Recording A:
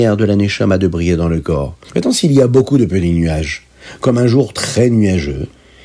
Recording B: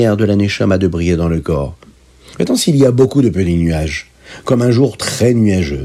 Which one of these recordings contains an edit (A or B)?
A